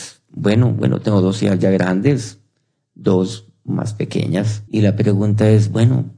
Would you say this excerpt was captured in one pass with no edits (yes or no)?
no